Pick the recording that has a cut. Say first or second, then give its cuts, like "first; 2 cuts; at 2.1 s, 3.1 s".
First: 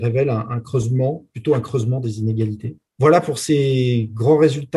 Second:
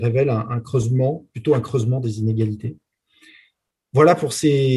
first; 1 cut; at 2.9 s